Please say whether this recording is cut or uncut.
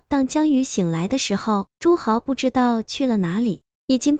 cut